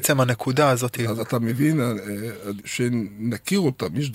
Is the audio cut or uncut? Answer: cut